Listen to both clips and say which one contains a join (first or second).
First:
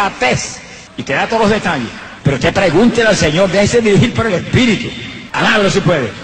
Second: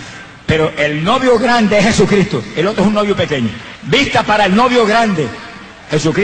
first